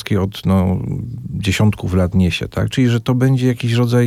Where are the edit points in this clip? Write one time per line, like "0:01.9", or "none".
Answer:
0:02.7